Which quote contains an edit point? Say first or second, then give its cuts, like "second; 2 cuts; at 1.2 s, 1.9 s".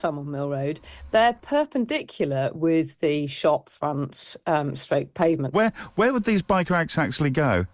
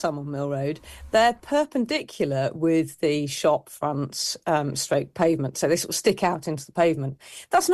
first; 1 cut; at 5.5 s